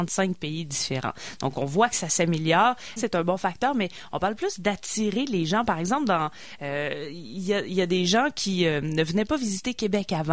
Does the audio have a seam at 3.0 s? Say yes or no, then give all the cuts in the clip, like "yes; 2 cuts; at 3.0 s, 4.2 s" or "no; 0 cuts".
yes; 1 cut; at 3.0 s